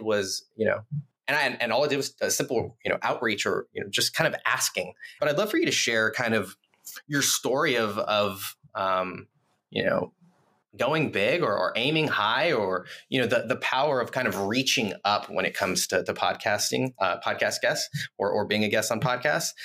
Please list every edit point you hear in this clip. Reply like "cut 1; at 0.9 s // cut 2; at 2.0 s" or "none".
cut 1; at 5.2 s